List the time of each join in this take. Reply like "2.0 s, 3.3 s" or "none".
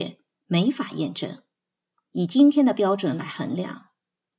2.1 s